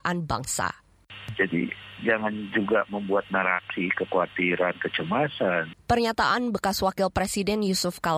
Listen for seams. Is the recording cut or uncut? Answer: cut